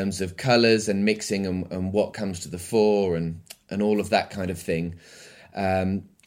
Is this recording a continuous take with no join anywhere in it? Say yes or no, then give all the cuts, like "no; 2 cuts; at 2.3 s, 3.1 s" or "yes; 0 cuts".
yes; 0 cuts